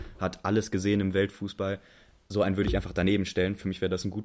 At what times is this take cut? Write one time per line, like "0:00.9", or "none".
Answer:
none